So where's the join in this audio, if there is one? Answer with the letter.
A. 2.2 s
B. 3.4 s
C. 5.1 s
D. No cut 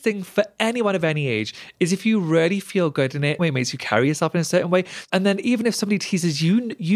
B